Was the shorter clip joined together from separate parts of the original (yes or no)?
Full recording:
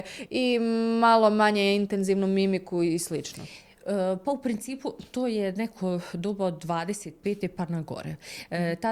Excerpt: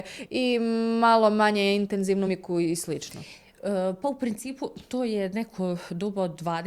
yes